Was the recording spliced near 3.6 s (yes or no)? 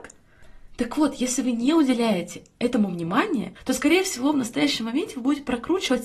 yes